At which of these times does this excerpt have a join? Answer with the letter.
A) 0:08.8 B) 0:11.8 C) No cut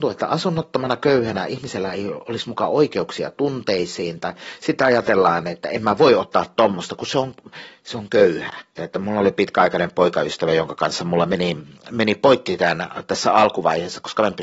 A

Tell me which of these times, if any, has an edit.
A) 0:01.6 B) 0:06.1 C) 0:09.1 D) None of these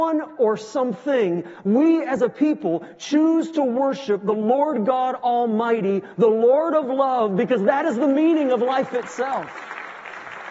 A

